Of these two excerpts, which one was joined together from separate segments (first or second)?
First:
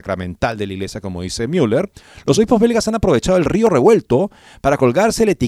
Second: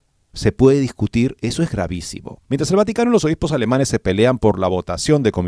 second